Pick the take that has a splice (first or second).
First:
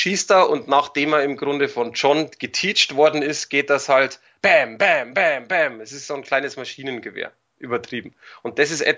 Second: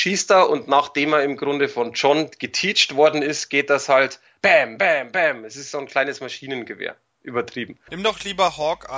second